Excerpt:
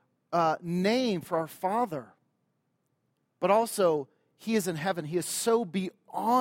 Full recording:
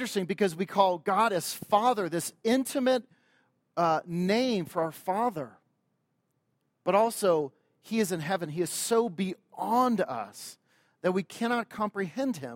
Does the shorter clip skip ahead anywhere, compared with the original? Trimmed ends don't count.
no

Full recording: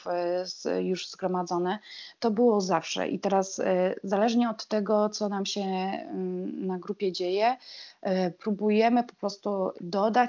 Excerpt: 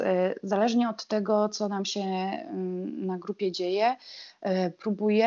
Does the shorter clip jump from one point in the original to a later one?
no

